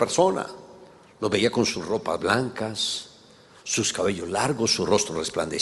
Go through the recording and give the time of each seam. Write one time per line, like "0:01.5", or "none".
none